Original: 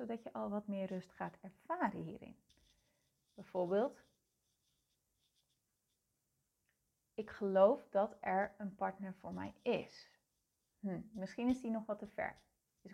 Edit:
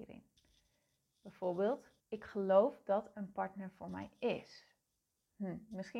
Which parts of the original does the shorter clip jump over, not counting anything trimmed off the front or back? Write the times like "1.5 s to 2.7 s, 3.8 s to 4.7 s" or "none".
4.1 s to 7.1 s, 8.2 s to 8.6 s